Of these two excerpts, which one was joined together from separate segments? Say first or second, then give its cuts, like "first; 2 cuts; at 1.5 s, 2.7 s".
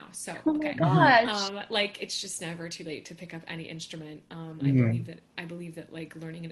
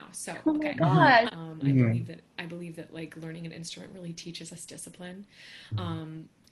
second; 1 cut; at 1.3 s